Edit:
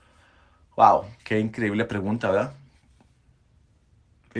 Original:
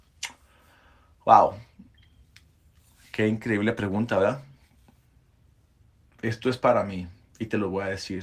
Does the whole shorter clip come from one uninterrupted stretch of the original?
no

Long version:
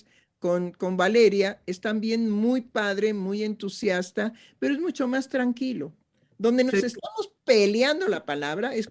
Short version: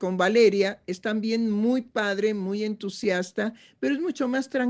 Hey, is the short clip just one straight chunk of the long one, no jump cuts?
yes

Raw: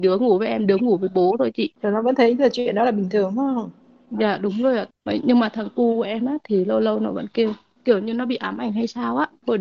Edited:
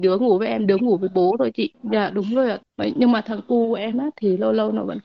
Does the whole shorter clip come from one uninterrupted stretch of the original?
no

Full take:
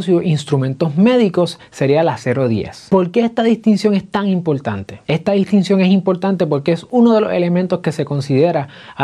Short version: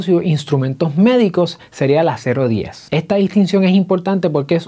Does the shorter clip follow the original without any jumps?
no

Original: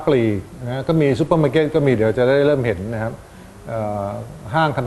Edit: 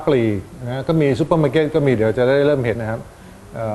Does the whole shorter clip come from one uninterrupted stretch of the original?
no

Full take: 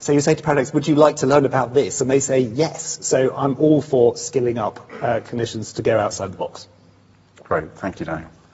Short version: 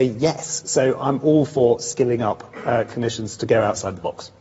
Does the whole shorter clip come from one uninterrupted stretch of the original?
yes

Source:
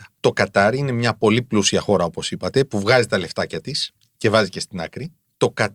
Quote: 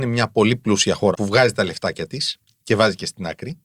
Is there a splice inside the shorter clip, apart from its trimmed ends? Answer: yes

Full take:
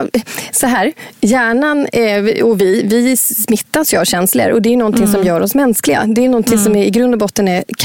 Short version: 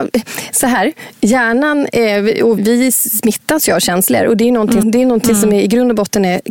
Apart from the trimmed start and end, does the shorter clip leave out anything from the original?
yes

